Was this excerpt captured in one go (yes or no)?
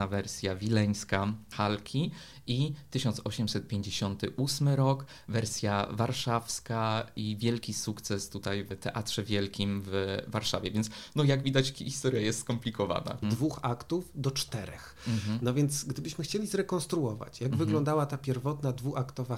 no